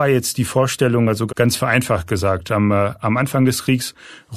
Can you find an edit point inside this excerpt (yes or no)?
yes